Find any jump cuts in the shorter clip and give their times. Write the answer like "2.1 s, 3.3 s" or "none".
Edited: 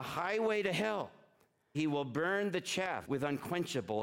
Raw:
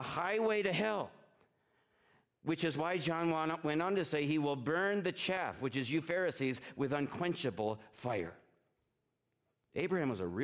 1.7 s, 3.0 s